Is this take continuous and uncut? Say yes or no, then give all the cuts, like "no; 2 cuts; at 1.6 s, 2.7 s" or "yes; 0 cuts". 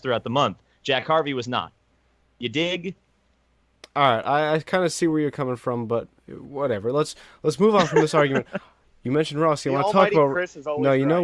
yes; 0 cuts